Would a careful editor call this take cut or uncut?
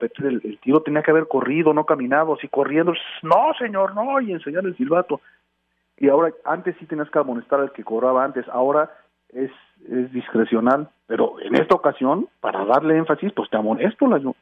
uncut